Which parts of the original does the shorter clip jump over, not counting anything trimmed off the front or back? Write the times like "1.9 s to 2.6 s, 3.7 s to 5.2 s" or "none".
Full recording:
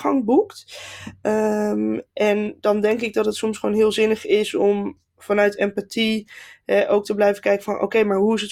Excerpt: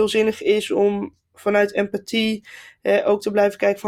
none